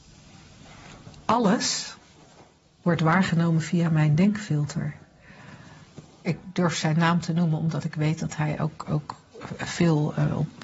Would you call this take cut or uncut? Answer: cut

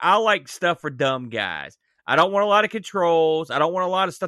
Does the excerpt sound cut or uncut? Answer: uncut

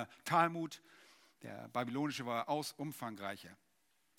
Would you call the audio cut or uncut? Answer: uncut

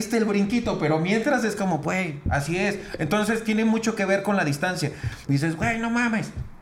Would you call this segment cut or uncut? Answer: cut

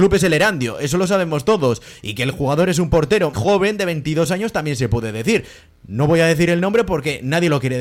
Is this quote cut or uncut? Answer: cut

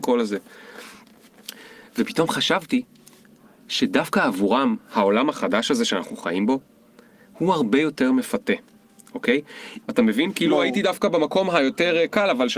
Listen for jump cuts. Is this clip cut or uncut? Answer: cut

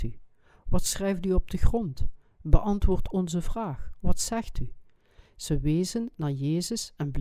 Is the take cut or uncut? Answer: uncut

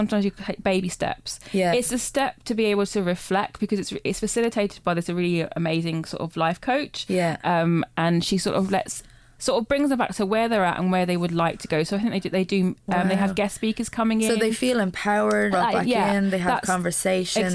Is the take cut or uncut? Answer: cut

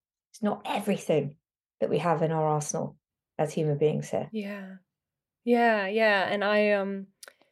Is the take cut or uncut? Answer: uncut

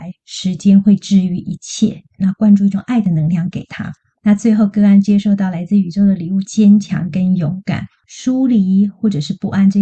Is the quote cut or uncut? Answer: cut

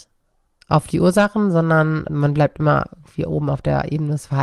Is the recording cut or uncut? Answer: cut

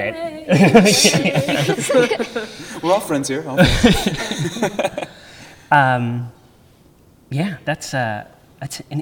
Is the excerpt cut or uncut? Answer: uncut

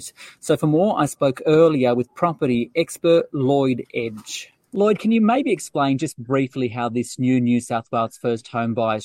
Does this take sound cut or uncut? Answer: uncut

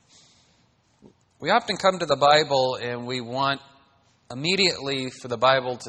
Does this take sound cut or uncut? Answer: uncut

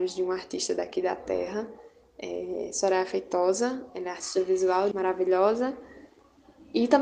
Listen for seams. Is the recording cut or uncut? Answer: cut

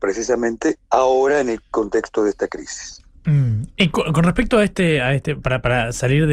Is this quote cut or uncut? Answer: uncut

